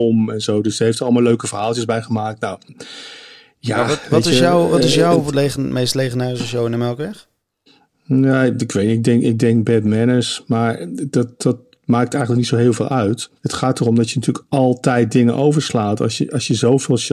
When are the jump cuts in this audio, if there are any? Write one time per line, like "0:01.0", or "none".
0:13.4